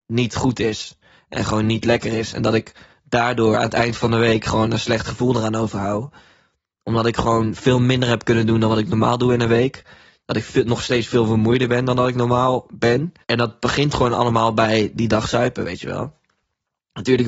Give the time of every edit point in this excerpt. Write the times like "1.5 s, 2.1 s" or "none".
13.2 s